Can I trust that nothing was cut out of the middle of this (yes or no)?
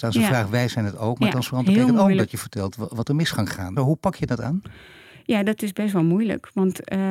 no